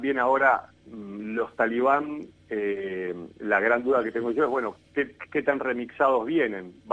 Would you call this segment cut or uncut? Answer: uncut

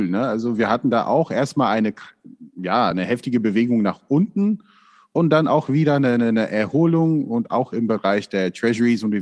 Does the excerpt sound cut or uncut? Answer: uncut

